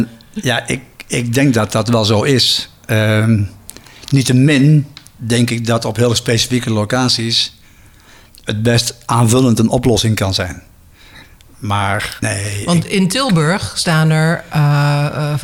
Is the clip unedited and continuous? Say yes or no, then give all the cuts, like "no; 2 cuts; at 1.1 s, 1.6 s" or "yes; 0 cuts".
no; 1 cut; at 12.2 s